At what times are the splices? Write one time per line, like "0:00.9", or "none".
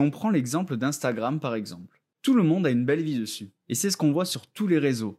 0:03.6